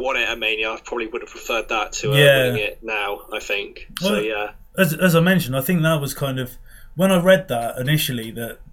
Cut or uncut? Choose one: uncut